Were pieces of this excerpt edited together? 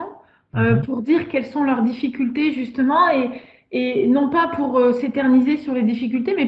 no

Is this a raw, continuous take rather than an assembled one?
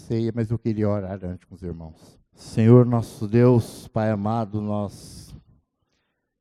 no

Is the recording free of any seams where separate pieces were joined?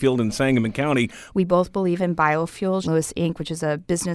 no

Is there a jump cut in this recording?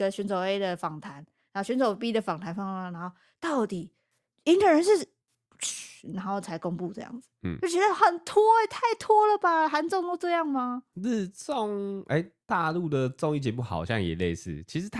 no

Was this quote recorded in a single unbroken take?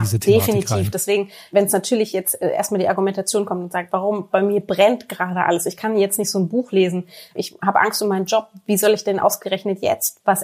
yes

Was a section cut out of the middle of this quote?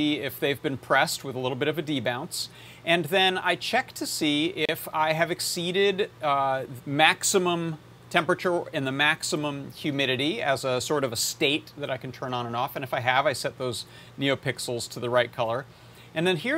yes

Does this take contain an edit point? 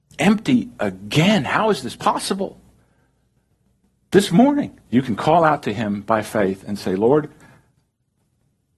yes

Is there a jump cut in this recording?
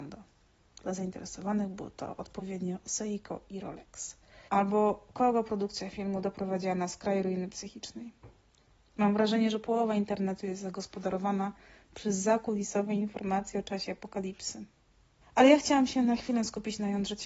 yes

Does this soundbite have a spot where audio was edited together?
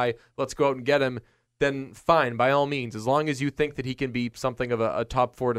no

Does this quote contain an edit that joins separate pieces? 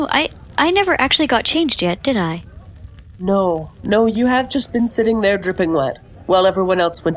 no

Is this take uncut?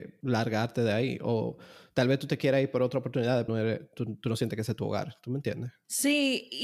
no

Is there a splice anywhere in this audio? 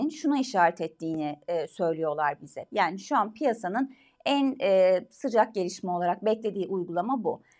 yes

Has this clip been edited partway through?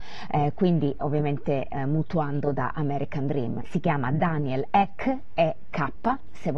yes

